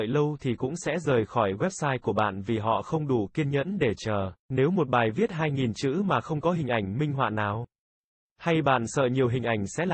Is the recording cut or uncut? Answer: cut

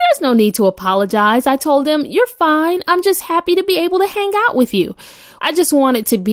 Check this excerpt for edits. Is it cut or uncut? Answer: cut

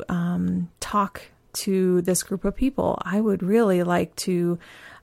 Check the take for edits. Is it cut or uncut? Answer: uncut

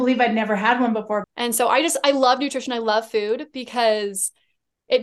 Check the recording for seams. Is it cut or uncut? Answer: cut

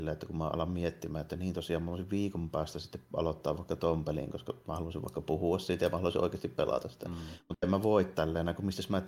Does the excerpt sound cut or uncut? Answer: uncut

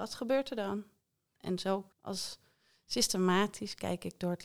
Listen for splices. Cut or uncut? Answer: cut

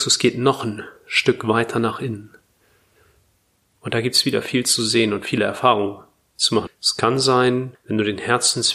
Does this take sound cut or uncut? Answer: cut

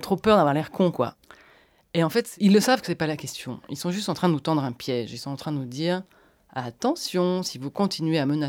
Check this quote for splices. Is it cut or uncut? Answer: uncut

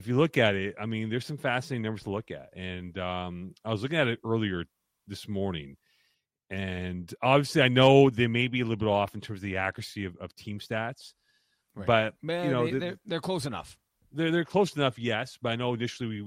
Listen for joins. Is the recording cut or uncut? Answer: uncut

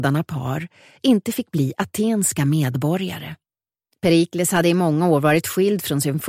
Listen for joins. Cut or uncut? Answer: cut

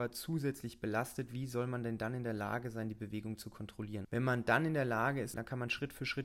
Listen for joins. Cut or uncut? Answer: cut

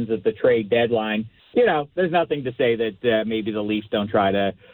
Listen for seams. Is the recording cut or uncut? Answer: uncut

